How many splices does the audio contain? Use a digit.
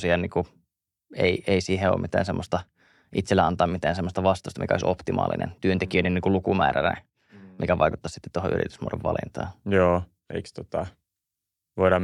1